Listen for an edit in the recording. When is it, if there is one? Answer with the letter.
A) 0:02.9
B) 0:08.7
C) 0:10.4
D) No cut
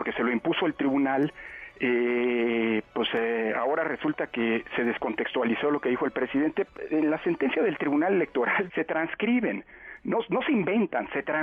B